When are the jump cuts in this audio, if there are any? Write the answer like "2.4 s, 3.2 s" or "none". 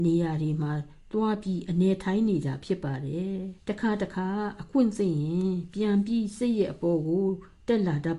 3.6 s